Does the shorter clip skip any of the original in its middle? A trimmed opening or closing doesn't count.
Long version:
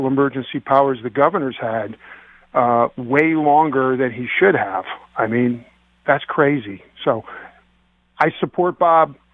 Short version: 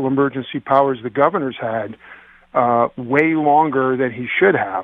no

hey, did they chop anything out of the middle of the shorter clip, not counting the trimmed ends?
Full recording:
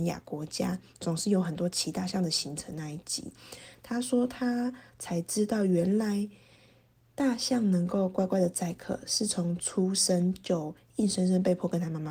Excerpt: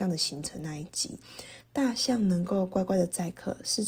yes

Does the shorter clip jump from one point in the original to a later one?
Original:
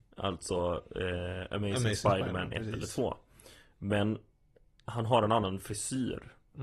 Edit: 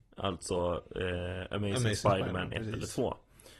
no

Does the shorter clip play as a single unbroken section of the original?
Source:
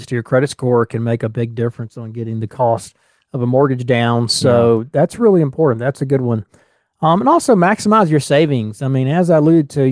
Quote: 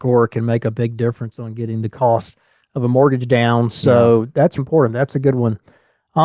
no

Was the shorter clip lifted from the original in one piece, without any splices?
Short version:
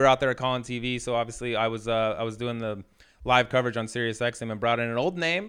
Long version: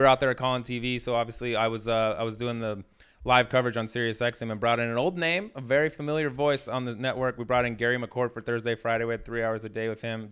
yes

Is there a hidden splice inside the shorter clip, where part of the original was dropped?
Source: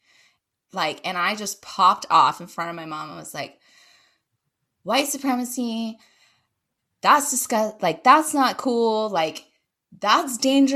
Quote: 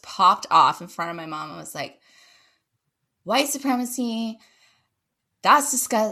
no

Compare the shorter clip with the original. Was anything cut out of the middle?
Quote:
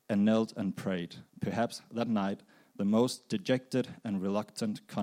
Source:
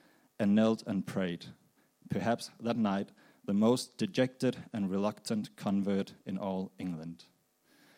yes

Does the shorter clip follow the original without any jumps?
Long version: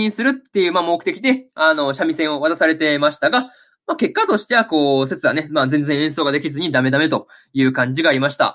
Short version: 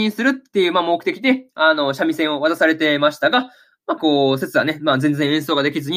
no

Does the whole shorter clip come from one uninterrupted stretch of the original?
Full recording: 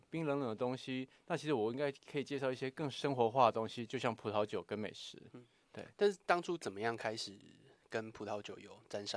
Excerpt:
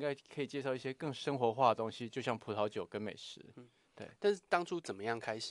yes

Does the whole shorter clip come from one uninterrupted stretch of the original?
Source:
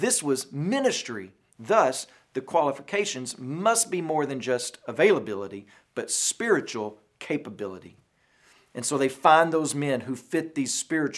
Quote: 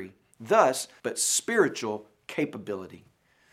no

